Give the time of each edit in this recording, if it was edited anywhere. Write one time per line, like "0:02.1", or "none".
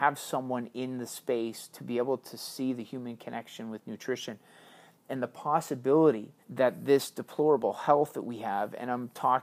0:06.4

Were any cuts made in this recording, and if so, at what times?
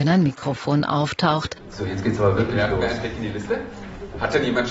none

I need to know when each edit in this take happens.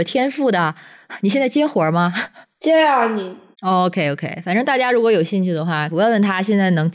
0:03.5
0:05.9

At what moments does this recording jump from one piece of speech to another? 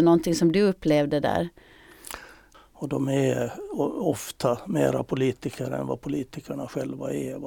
0:02.5

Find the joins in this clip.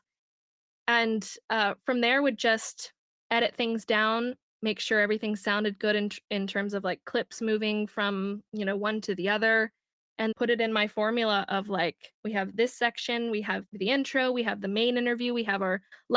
0:10.3
0:13.6

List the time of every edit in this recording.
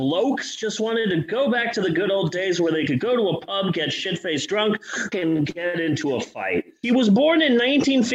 0:05.1
0:06.8

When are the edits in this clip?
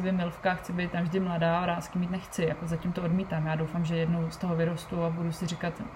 none

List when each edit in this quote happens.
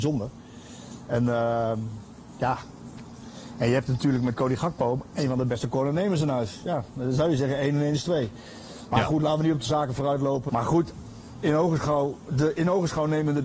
0:10.5

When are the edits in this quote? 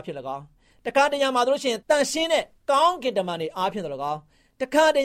0:01.8

